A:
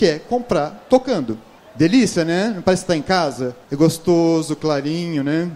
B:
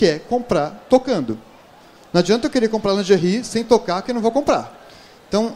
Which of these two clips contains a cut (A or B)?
A